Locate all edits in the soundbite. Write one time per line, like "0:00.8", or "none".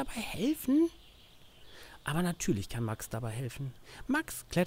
none